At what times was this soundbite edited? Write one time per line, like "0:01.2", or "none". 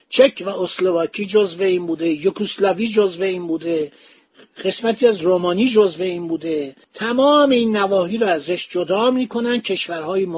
0:06.8